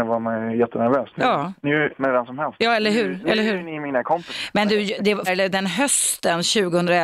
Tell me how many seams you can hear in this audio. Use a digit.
2